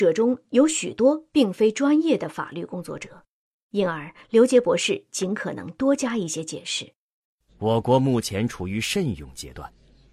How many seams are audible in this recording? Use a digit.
1